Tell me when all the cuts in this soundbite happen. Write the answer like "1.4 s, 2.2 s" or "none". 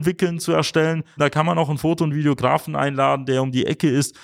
1.2 s